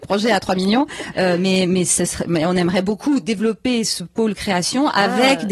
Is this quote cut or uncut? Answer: uncut